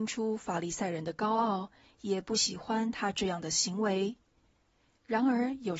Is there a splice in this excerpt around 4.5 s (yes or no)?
no